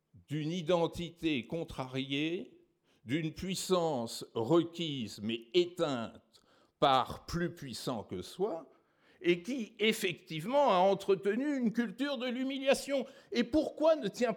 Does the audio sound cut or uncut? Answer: uncut